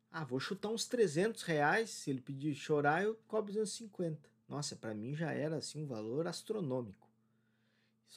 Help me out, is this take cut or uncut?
cut